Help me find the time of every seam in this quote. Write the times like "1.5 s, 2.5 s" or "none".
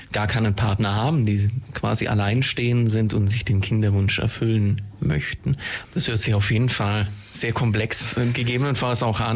5.8 s